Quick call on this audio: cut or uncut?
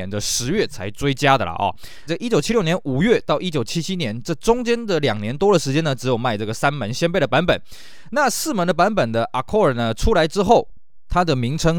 cut